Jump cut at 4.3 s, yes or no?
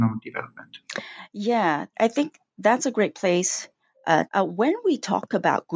yes